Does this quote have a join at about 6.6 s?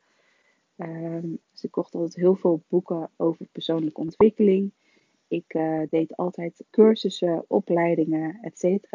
yes; 2 cuts; at 1.4 s, 6.6 s

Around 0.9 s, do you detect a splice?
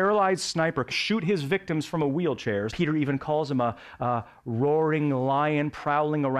yes; 2 cuts; at 0.9 s, 2.7 s

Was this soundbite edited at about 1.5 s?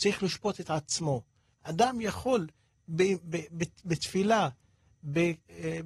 yes; 1 cut; at 1.5 s

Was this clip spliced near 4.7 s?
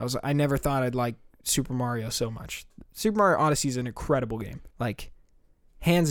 yes; 1 cut; at 4.7 s

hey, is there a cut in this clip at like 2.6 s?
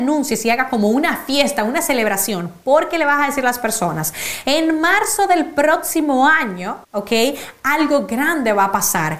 no; 1 cut; at 6.8 s

